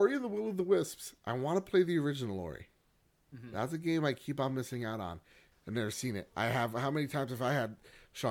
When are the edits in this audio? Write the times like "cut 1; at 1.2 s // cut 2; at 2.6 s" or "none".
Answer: cut 1; at 5.5 s